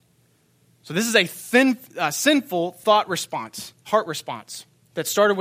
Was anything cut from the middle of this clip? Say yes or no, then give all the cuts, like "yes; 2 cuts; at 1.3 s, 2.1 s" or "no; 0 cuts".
yes; 1 cut; at 3.8 s